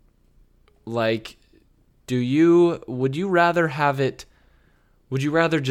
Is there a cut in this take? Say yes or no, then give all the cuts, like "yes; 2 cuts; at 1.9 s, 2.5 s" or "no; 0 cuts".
no; 0 cuts